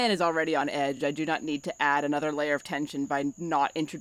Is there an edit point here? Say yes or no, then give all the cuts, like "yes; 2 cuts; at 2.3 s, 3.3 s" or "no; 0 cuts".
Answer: no; 0 cuts